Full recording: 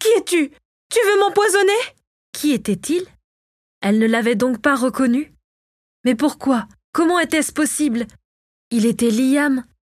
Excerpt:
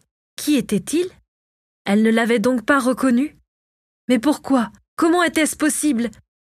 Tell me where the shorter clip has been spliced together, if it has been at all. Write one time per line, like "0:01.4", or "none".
none